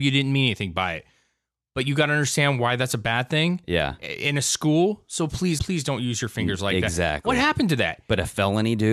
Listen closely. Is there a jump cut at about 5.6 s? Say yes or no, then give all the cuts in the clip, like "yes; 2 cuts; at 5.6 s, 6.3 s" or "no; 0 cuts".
yes; 1 cut; at 5.6 s